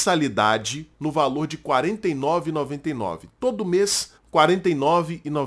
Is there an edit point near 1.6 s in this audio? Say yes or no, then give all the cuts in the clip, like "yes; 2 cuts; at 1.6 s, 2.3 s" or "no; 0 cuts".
no; 1 cut; at 4.2 s